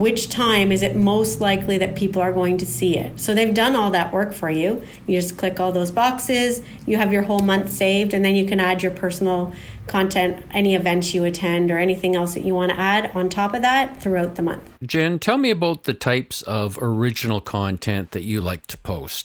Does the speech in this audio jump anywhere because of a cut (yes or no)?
yes